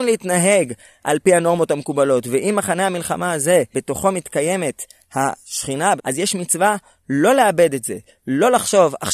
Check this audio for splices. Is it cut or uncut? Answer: cut